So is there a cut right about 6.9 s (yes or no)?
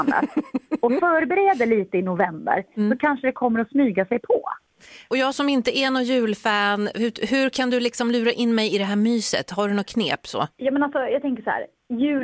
no